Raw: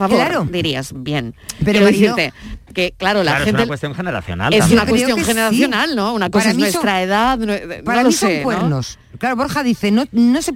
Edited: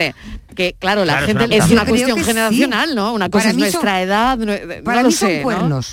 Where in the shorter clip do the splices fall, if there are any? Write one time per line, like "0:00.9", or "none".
0:01.5